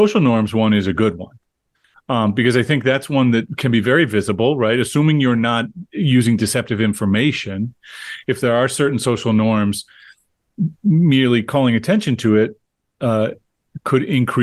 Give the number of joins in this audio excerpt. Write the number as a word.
zero